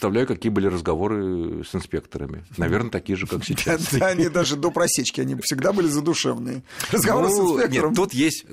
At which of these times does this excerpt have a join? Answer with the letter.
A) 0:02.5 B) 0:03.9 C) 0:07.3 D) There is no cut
D